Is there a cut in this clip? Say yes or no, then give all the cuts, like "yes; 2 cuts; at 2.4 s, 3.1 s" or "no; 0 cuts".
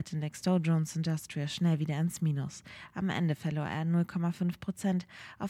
no; 0 cuts